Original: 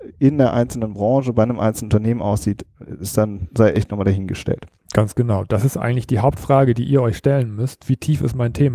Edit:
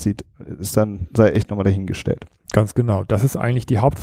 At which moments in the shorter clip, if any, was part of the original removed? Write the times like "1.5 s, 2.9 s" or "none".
none